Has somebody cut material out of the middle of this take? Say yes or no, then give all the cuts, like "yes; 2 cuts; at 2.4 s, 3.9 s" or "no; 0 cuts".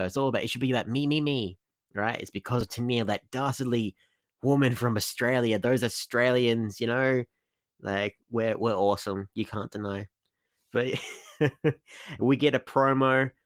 no; 0 cuts